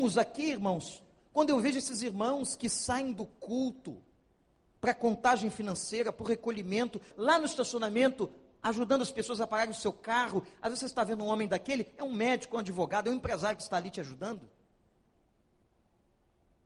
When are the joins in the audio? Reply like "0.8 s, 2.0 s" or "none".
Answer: 7.1 s